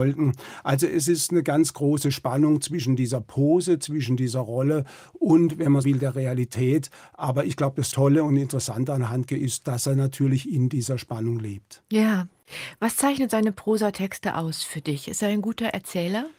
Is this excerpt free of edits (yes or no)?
no